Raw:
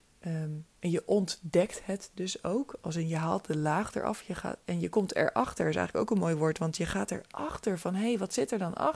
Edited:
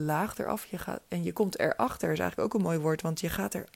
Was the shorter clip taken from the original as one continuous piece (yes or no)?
yes